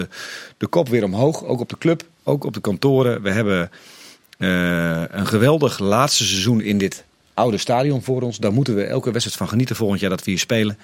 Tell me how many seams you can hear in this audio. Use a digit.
0